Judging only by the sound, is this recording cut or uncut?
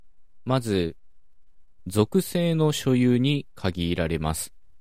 cut